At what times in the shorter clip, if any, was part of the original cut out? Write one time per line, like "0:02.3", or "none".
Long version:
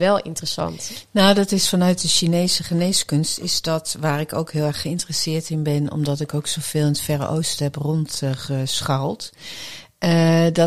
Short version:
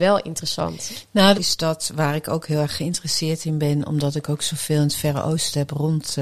0:01.3